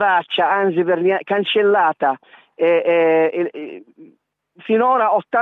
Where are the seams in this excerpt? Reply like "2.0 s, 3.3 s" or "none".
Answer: none